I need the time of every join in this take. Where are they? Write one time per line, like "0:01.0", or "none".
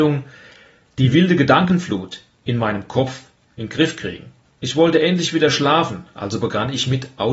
none